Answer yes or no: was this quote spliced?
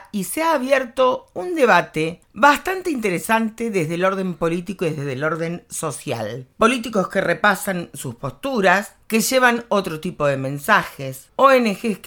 no